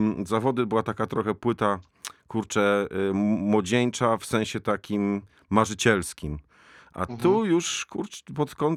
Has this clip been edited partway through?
no; 0 cuts

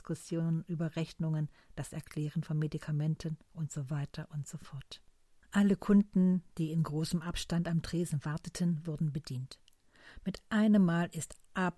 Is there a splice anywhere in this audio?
no; 0 cuts

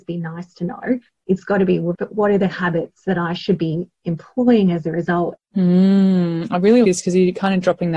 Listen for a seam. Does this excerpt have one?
yes; 3 cuts; at 1.9 s, 5.4 s, 6.8 s

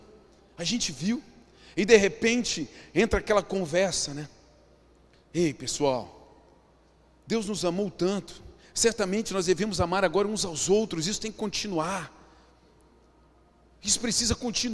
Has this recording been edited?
no; 0 cuts

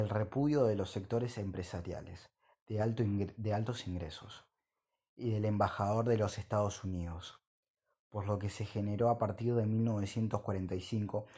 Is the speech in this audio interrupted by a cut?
no; 0 cuts

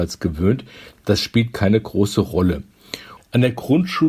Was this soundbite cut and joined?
yes; 1 cut; at 3.2 s

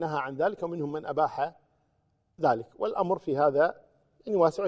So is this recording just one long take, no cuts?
yes; 0 cuts

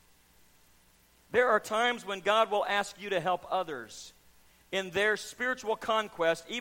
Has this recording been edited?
no; 0 cuts

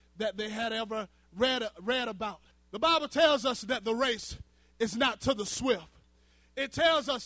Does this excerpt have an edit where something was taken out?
yes; 1 cut; at 2.5 s

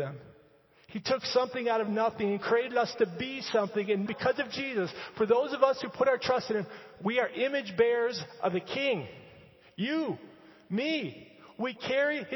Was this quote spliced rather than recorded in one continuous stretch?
yes; 1 cut; at 4.1 s

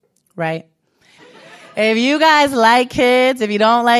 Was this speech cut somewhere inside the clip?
yes; 1 cut; at 1.2 s

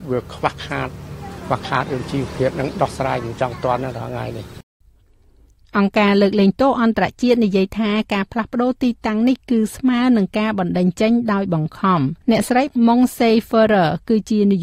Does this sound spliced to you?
yes; 1 cut; at 12.2 s

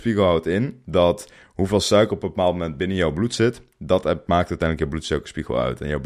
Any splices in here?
no; 0 cuts

